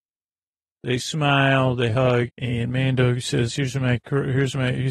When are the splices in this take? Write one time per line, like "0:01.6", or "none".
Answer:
0:02.3